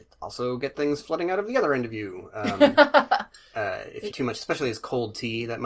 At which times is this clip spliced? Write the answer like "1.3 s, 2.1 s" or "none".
4.1 s